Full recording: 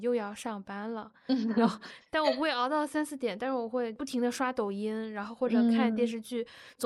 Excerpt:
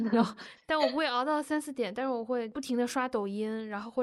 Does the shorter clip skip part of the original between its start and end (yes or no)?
no